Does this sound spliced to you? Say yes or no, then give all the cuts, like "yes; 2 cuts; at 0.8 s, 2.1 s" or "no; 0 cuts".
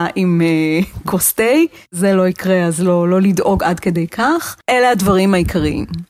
yes; 1 cut; at 4.6 s